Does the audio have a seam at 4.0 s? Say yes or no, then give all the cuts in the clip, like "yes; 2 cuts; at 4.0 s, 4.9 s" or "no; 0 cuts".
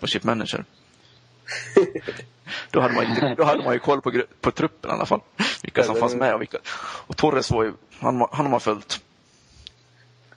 no; 1 cut; at 7.9 s